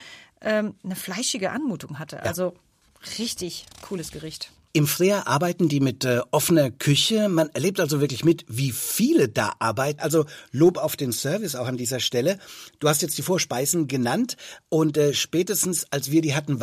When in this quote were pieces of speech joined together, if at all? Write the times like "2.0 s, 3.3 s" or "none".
10.0 s